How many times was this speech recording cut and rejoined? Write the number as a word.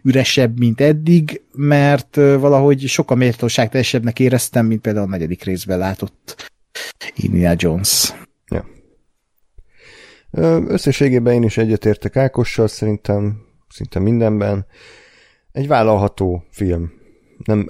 zero